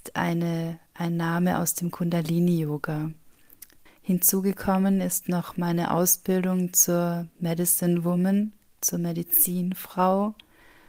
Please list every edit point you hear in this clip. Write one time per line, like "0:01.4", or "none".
0:03.9

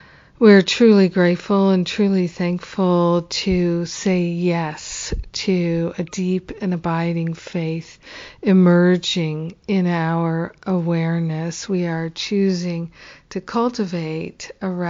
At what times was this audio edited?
0:11.7

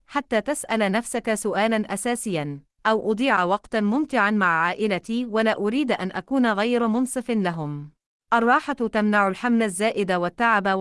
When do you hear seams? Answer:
0:02.7
0:08.2

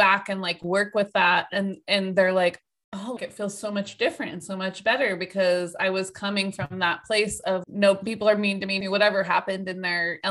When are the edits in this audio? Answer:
0:03.2
0:07.6
0:08.8

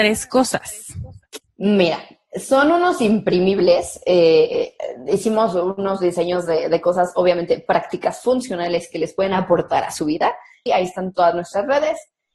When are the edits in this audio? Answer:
0:01.4
0:10.7

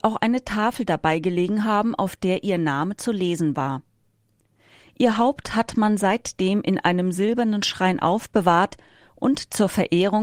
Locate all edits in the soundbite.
none

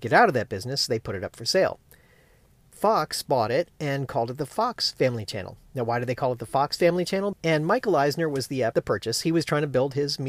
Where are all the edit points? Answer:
0:07.3
0:08.7

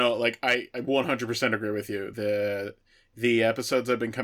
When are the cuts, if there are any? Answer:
none

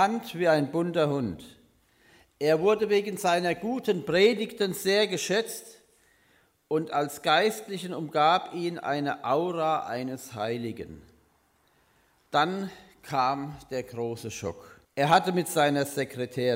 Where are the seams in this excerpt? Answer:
0:14.8

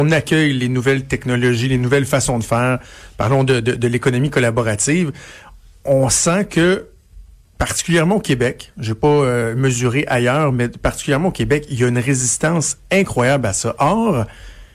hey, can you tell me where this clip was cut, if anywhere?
none

